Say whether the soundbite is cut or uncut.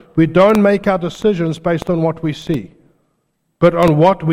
uncut